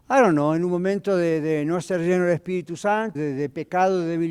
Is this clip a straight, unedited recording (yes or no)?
no